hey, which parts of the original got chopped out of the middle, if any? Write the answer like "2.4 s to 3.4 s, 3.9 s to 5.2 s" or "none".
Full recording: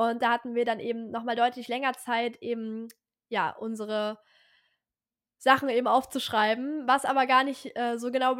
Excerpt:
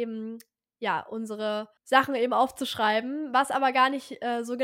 4.3 s to 5.3 s